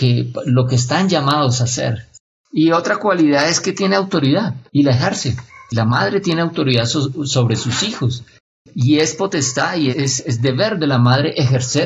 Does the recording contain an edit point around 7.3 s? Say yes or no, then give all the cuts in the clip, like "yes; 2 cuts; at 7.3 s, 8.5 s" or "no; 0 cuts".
no; 1 cut; at 9.9 s